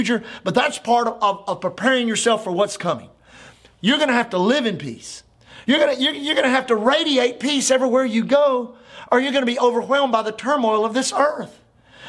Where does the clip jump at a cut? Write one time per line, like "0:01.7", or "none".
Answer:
0:05.6